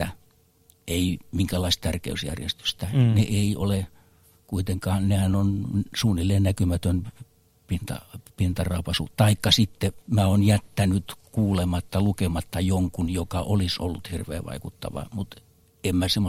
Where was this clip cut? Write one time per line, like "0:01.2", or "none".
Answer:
0:10.0